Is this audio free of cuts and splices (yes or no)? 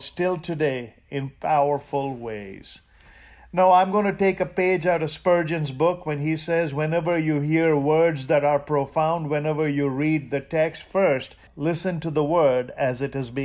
no